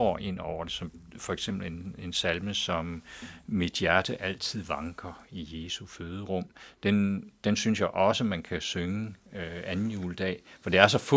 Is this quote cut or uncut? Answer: uncut